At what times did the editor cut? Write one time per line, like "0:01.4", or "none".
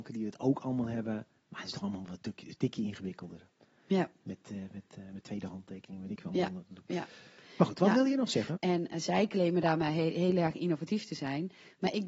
0:08.6

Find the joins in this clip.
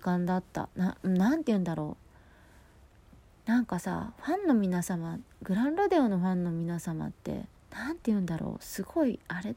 0:07.6

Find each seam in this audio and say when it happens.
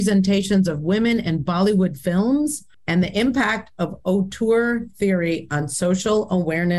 0:02.7

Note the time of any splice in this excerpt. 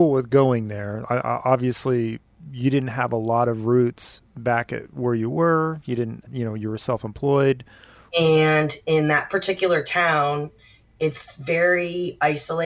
0:06.3
0:08.1

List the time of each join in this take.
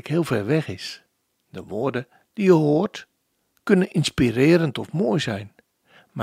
0:01.4

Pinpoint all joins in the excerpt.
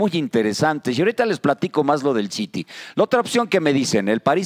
none

